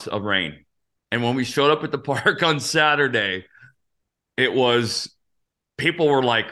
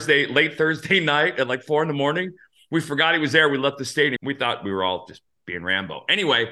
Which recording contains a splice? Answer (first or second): second